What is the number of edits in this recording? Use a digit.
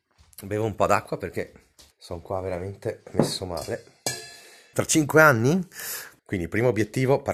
3